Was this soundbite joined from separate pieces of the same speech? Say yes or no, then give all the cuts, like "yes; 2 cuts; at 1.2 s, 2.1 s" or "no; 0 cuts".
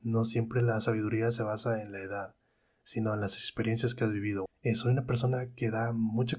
yes; 1 cut; at 4.5 s